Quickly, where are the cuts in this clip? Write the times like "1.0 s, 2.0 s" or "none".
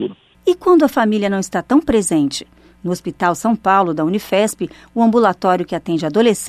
none

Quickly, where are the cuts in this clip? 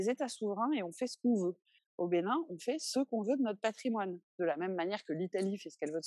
1.8 s

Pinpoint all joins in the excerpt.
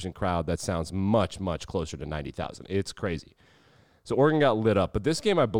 none

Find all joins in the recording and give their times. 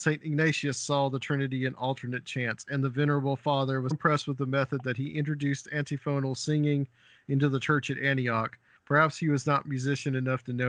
3.9 s, 8.8 s

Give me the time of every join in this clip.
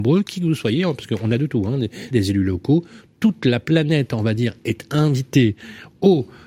2.1 s

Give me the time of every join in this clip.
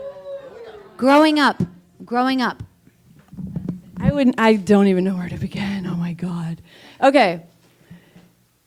none

